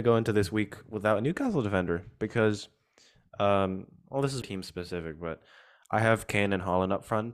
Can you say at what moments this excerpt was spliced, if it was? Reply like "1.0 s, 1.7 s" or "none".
4.4 s